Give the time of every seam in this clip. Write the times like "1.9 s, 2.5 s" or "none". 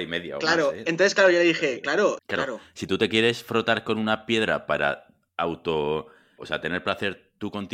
2.2 s, 6.4 s